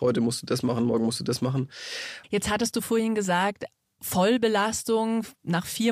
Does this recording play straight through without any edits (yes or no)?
no